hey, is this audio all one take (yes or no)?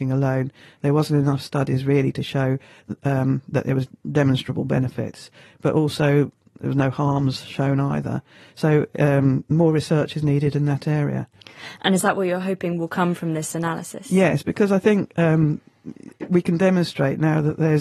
yes